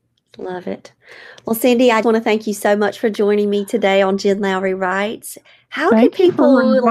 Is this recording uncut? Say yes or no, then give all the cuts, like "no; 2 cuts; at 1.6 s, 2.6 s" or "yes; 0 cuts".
no; 1 cut; at 2.0 s